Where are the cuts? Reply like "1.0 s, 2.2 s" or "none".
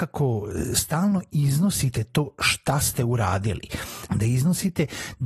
4.1 s